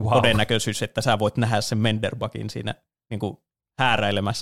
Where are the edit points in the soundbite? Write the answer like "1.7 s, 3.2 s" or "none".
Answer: none